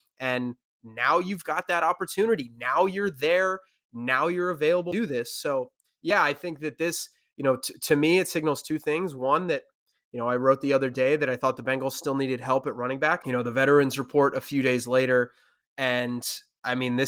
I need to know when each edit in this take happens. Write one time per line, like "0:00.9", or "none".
0:13.2